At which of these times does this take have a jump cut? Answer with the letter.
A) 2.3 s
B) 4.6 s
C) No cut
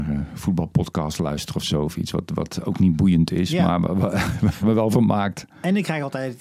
B